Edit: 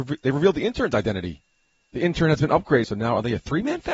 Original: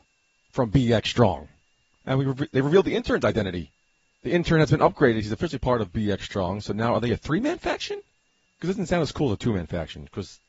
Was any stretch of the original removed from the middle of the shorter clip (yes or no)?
yes